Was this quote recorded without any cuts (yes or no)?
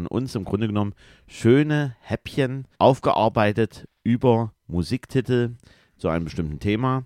no